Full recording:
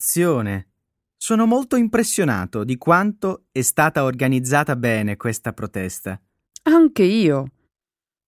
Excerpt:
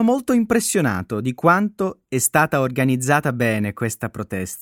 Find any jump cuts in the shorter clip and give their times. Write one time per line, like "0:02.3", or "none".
none